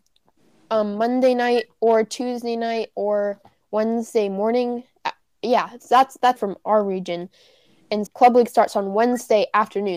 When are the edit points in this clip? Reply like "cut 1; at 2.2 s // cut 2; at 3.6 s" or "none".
cut 1; at 6.4 s // cut 2; at 8.1 s